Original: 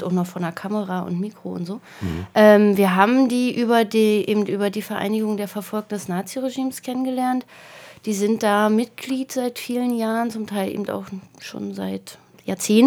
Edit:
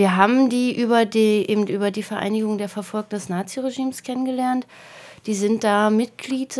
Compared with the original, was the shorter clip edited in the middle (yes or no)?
no